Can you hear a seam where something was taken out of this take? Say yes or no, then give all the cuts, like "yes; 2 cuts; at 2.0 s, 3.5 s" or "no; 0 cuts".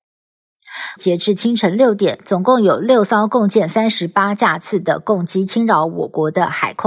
yes; 1 cut; at 1.0 s